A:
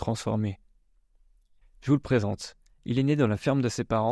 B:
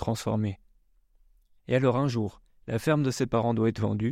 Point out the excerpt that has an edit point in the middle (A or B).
A